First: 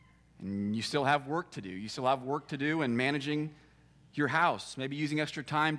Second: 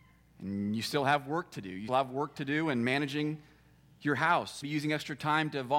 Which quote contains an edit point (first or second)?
second